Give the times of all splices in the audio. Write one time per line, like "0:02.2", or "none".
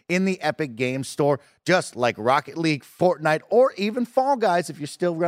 none

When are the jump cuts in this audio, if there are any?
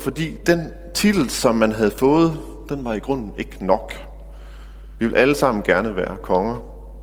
0:05.0

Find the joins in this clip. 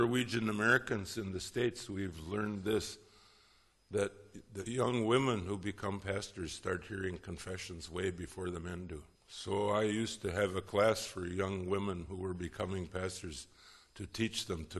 0:09.2

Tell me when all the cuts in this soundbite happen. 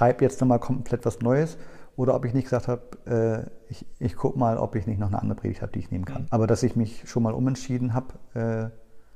0:06.3

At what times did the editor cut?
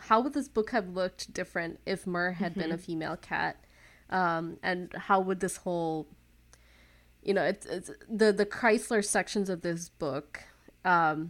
none

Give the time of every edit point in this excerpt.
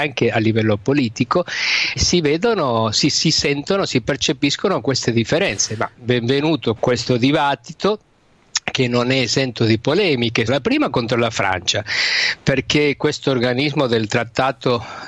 0:02.0
0:06.8
0:10.5

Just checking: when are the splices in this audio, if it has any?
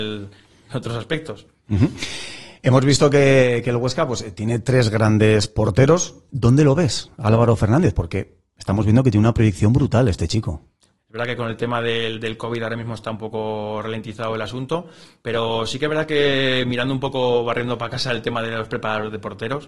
0:06.3
0:11.0

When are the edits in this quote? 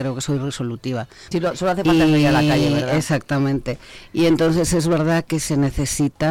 0:01.3

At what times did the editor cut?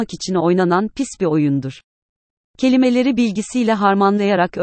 0:02.4

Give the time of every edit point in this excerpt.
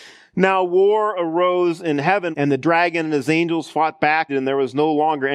0:02.3
0:04.3

